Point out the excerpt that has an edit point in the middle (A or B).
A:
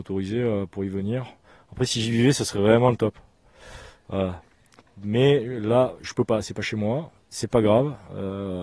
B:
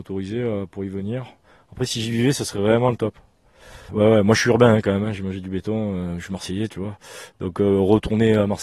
B